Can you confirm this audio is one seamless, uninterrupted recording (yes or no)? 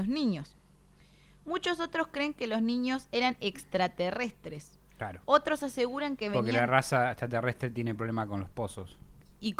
yes